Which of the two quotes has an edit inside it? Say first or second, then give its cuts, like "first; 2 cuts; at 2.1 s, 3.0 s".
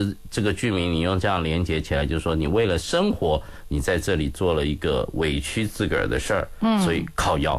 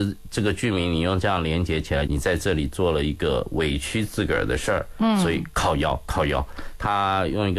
second; 1 cut; at 2.1 s